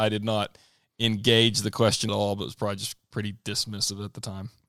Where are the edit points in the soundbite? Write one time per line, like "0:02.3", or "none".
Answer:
0:02.1

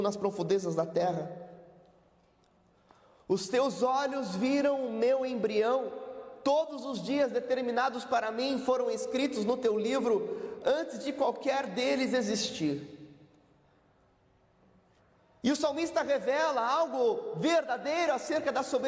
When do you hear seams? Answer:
none

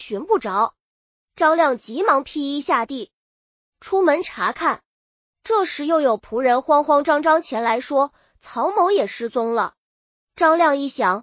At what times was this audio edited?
none

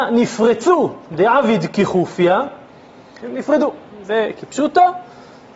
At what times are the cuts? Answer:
0:03.2

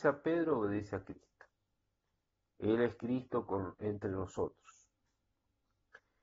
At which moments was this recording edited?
none

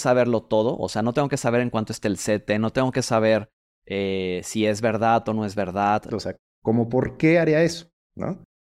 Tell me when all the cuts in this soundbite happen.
0:06.1

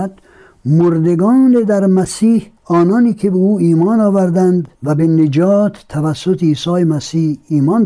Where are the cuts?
0:02.6
0:04.7

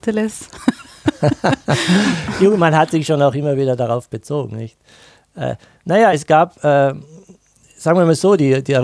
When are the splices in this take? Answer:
none

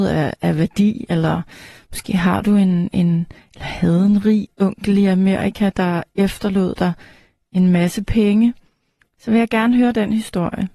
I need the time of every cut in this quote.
none

